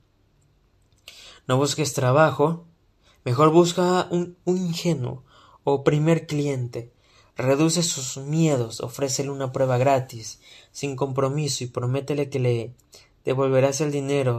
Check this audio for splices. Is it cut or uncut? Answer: uncut